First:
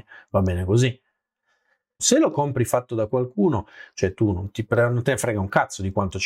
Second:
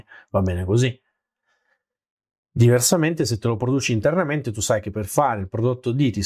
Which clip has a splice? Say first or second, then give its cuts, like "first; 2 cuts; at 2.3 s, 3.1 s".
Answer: first; 2 cuts; at 2.0 s, 3.9 s